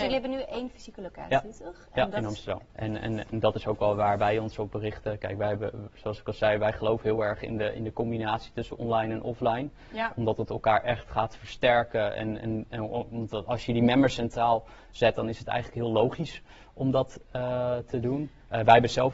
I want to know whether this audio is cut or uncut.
cut